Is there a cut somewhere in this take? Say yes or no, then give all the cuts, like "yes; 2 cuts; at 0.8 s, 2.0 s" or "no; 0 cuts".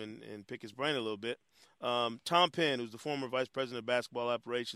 no; 0 cuts